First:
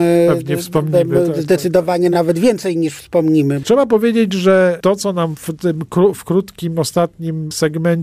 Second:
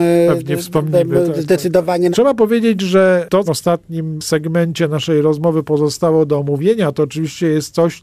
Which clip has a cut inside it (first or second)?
second